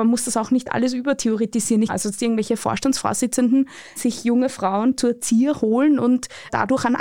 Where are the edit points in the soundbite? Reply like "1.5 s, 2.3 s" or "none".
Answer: 1.9 s